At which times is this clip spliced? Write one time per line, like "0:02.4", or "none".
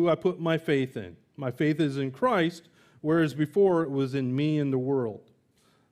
none